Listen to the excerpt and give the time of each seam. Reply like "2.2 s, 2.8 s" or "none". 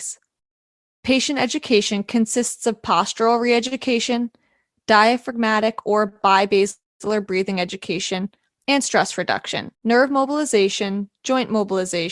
9.7 s